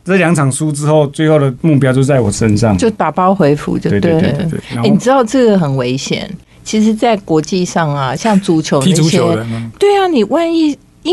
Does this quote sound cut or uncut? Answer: uncut